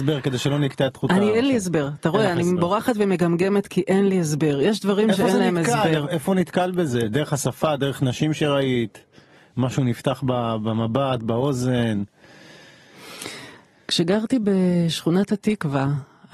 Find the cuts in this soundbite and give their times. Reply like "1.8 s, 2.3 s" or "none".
none